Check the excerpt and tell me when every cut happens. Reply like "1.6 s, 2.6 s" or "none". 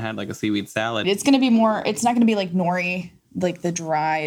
1.0 s